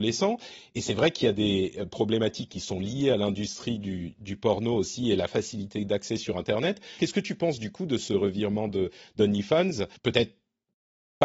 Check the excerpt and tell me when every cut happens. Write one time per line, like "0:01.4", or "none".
0:07.0
0:10.0